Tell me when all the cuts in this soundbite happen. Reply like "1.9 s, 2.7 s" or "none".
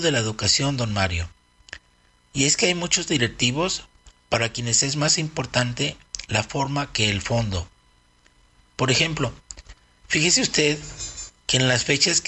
none